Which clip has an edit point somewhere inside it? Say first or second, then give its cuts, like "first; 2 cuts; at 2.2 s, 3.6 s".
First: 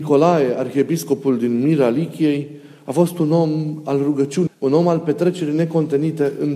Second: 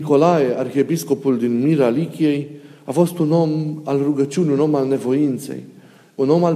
first; 1 cut; at 4.5 s